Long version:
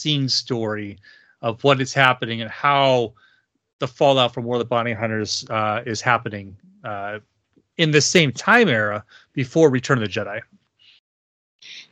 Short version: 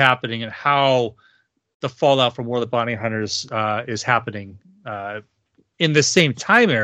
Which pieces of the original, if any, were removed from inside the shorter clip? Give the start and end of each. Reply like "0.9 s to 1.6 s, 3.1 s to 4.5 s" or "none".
none